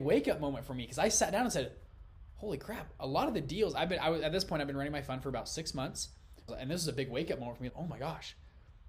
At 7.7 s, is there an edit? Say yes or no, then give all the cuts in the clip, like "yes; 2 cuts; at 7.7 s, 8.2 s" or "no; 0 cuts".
yes; 2 cuts; at 6.5 s, 7.7 s